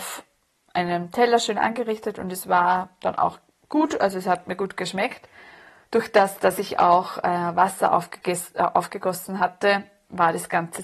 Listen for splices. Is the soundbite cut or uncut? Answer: cut